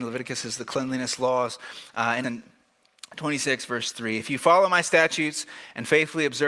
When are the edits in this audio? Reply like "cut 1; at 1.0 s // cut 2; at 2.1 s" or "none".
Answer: cut 1; at 2.2 s